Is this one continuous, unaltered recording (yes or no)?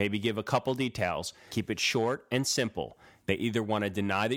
no